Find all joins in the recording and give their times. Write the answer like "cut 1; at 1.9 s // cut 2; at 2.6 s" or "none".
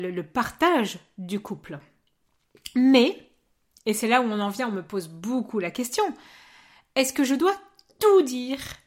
none